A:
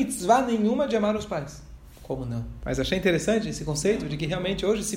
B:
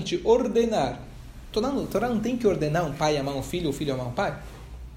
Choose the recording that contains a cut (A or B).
A